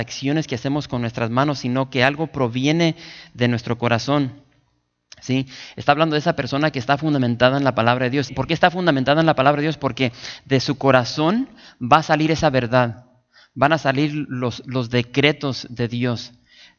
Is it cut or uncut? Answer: cut